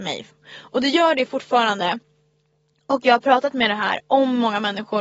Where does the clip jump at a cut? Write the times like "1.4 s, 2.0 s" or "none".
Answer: none